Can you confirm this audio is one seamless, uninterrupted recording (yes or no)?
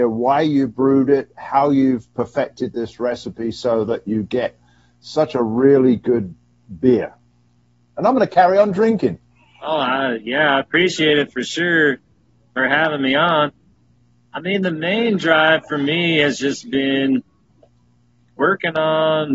yes